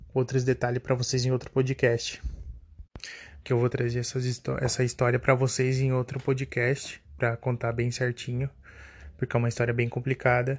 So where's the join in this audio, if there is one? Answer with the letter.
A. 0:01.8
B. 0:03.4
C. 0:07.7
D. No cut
B